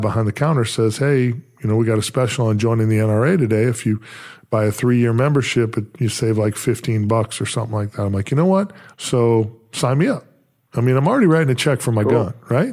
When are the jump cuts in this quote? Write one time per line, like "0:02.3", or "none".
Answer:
0:08.9